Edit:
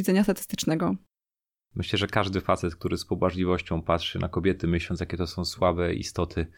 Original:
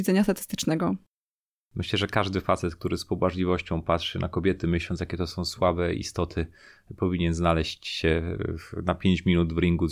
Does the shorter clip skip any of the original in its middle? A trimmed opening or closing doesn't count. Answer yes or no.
no